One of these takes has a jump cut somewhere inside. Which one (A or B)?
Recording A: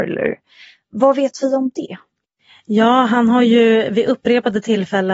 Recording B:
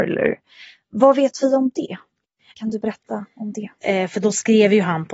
B